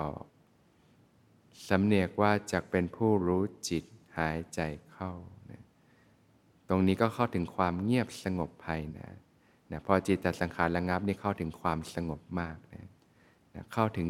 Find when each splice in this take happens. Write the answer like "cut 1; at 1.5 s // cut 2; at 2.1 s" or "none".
cut 1; at 8.9 s